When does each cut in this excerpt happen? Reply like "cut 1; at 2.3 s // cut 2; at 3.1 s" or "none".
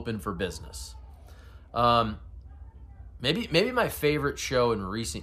cut 1; at 3.2 s

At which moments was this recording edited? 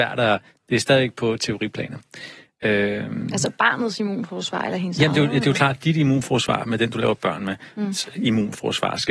none

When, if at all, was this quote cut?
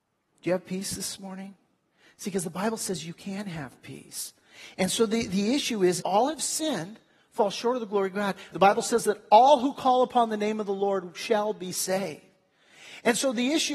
cut 1; at 6.0 s // cut 2; at 8.5 s

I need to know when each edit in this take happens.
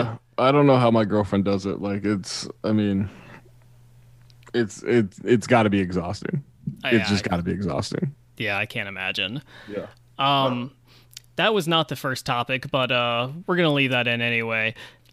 none

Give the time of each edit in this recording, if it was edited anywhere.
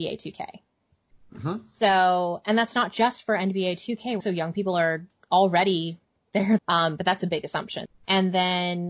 cut 1; at 4.2 s // cut 2; at 6.6 s // cut 3; at 7.8 s

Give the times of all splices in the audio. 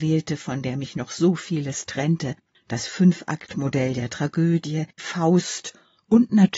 cut 1; at 5.0 s

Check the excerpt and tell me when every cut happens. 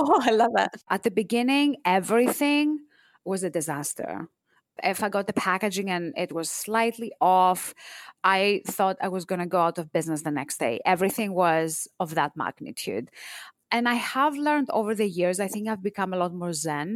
cut 1; at 8.2 s

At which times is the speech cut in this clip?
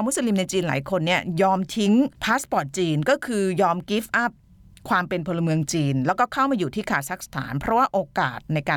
none

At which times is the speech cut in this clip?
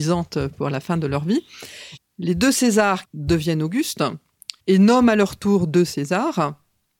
cut 1; at 2.0 s // cut 2; at 3.0 s // cut 3; at 4.6 s

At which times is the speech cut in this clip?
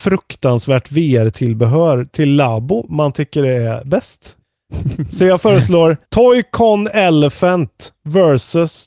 cut 1; at 4.4 s // cut 2; at 6.0 s

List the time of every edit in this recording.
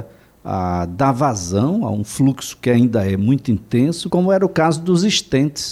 cut 1; at 4.1 s

